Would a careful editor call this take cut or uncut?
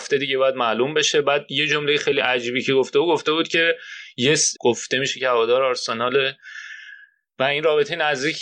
cut